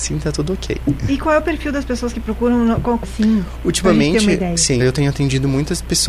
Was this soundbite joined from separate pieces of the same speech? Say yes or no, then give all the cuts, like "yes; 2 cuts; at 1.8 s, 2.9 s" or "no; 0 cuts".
yes; 2 cuts; at 3.0 s, 4.8 s